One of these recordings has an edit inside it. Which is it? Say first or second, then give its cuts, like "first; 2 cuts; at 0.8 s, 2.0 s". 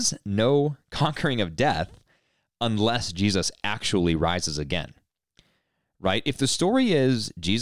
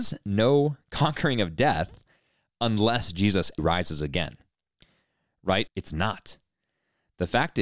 second; 2 cuts; at 3.6 s, 5.7 s